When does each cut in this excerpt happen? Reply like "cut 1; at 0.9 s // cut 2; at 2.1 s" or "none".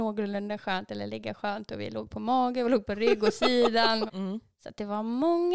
cut 1; at 4.1 s